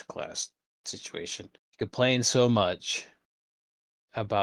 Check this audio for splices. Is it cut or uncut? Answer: cut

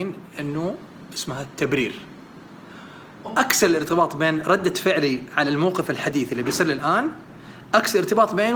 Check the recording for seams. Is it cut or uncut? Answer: cut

